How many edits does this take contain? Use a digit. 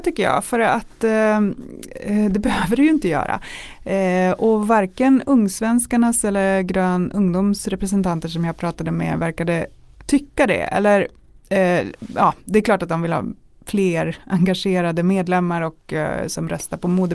0